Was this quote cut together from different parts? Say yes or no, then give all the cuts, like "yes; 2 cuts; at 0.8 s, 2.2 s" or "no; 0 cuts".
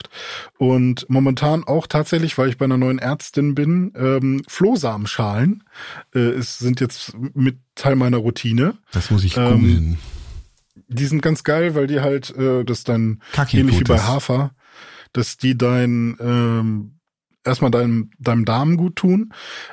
yes; 1 cut; at 12.7 s